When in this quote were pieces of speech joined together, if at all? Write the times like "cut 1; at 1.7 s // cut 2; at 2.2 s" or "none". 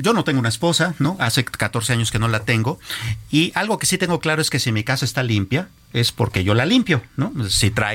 none